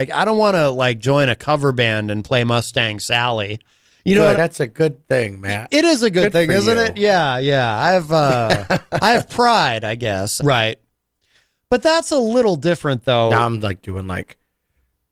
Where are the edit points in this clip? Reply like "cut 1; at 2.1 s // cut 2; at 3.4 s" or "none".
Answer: cut 1; at 4.3 s // cut 2; at 10.4 s